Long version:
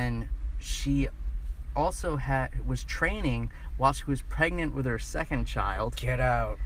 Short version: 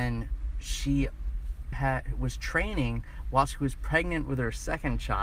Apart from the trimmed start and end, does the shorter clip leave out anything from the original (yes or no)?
yes